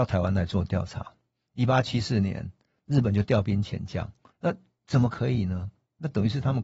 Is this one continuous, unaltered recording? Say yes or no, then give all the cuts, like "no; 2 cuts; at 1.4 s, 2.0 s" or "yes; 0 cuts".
no; 1 cut; at 4.3 s